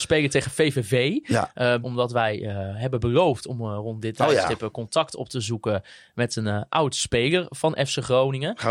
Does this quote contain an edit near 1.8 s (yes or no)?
yes